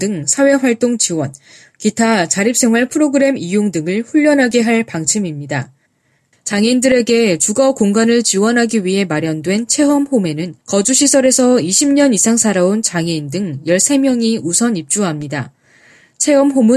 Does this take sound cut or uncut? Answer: cut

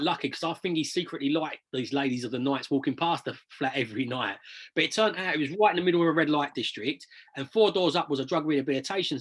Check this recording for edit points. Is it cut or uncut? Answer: uncut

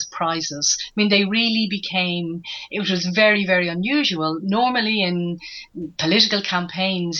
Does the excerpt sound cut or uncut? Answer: uncut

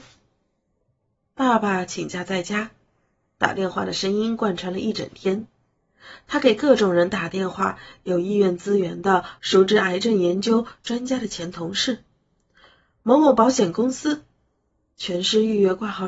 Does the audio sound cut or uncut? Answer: cut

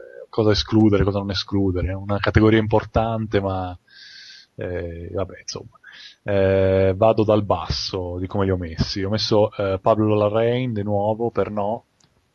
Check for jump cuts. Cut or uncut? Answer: uncut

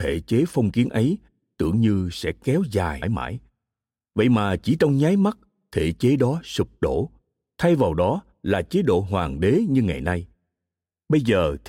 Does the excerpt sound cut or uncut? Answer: cut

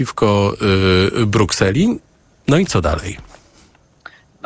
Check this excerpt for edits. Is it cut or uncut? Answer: uncut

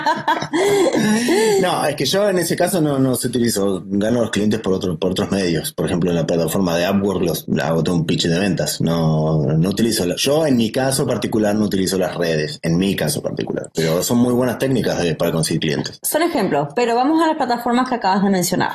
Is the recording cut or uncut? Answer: uncut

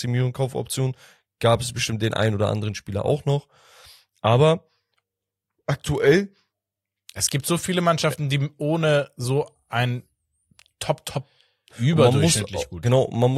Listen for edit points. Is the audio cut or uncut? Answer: cut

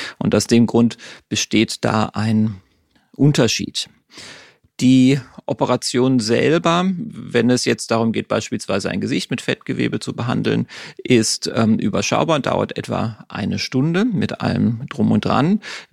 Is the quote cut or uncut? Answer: uncut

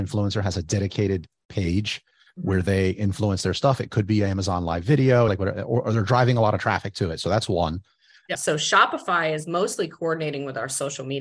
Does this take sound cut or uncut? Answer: cut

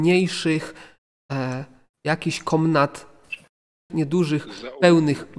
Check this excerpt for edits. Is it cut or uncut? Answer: cut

